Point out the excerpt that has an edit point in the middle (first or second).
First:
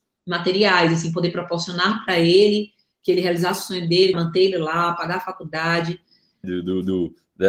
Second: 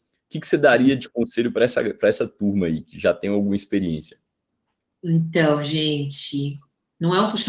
first